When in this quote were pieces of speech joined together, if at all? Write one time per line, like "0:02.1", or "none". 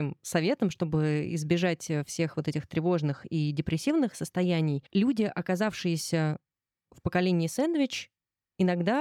none